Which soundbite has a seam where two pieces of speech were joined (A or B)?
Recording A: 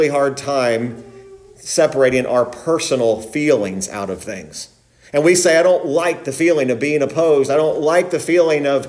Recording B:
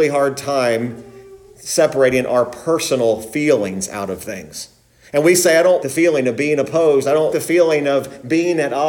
B